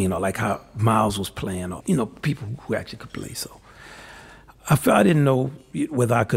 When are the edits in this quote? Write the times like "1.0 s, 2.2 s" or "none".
1.8 s